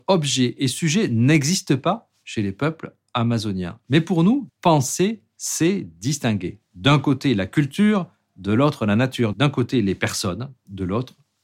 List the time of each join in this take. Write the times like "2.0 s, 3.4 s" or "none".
4.5 s, 9.3 s